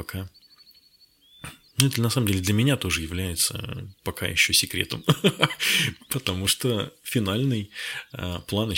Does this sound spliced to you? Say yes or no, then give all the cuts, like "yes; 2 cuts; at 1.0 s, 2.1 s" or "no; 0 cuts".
no; 0 cuts